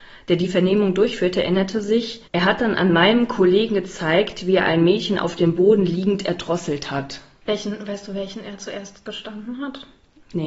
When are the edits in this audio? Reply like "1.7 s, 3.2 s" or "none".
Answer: 2.3 s, 7.4 s